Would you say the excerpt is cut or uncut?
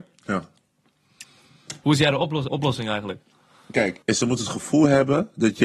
cut